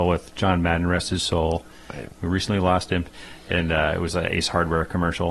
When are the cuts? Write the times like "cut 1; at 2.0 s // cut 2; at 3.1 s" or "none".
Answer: none